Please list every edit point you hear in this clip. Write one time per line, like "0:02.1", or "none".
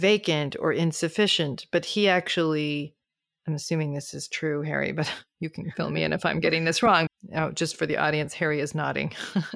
0:07.1